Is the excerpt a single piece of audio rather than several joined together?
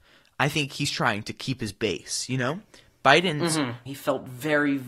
no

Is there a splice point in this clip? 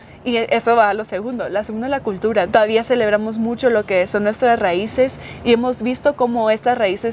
yes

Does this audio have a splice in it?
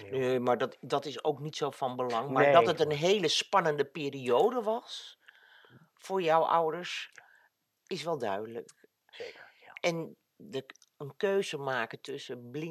yes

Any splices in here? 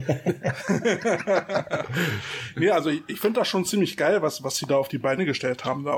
no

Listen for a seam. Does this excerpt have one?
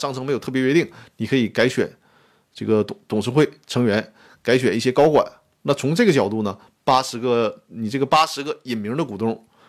no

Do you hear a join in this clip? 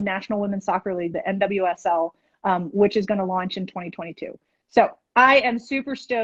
no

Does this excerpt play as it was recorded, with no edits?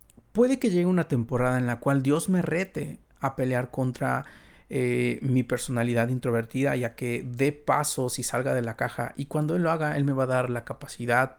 yes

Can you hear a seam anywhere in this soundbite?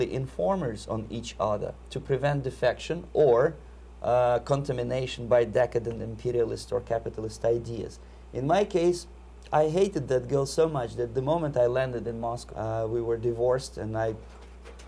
yes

